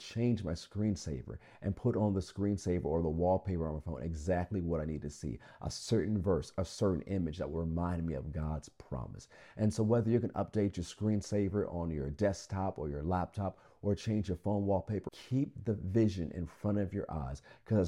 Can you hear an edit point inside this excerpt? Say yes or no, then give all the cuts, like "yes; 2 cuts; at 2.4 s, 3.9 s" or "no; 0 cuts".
yes; 1 cut; at 15.1 s